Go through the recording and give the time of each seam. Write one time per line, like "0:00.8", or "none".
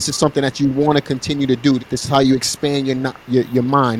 0:01.8

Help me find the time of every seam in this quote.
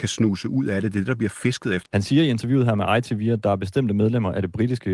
0:01.9

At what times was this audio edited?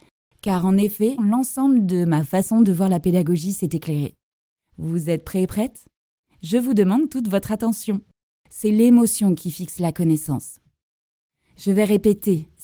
0:01.2

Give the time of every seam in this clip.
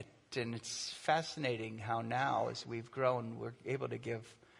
none

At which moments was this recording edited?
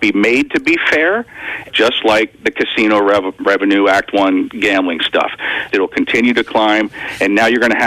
0:01.7
0:05.7

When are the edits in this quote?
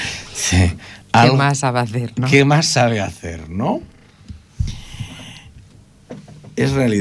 0:01.0

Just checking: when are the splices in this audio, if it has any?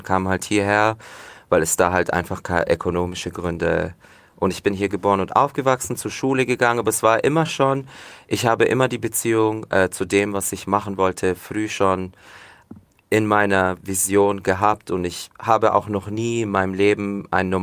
none

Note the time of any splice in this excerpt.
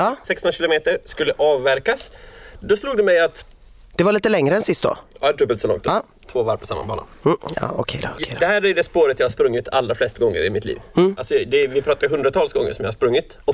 none

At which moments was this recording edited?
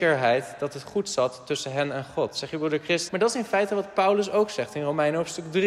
0:03.1

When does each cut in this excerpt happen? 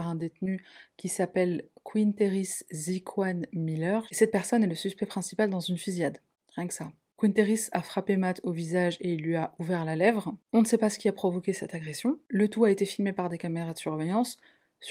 0:04.1

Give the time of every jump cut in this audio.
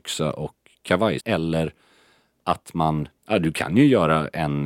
0:01.2
0:03.2

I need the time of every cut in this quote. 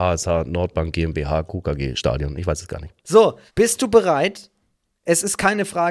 0:03.5

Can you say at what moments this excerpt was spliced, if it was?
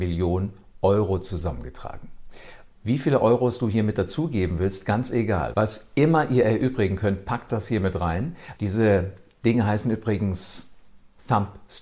0:02.7
0:05.5
0:08.6

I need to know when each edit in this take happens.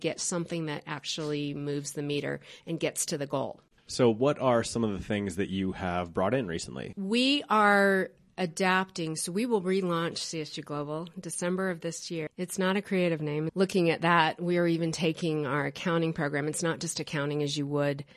0:06.9
0:12.3
0:13.5

